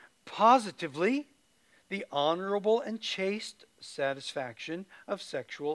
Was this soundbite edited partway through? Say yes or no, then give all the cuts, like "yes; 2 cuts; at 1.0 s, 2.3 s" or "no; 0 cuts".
no; 0 cuts